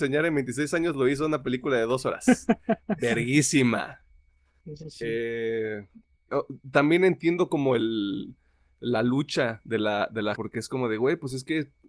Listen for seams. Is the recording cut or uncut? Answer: cut